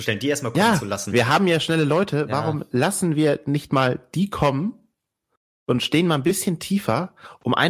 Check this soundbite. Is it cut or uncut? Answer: uncut